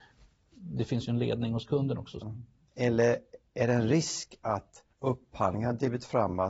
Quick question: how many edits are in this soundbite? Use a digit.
2